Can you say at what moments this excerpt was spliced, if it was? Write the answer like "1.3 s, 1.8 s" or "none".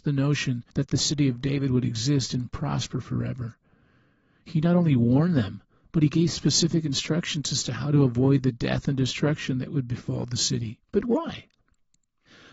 10.9 s